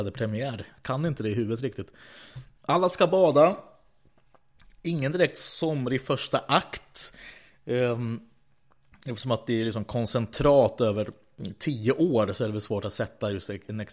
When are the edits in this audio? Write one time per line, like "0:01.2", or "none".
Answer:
0:02.6